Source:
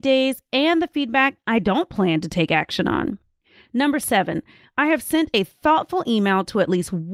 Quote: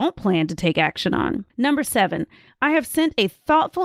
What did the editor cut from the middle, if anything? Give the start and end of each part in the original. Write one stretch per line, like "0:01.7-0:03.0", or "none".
0:03.2-0:03.7